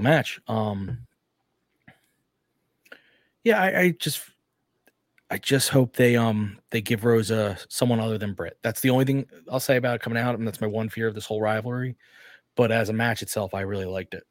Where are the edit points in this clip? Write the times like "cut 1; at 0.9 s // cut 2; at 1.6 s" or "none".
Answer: none